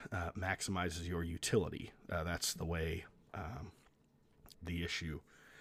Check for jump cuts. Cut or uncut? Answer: cut